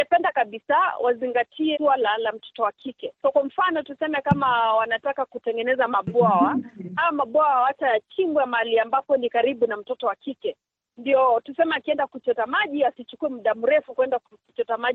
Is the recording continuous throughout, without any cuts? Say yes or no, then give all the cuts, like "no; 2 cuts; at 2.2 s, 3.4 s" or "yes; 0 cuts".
no; 2 cuts; at 1.7 s, 3.2 s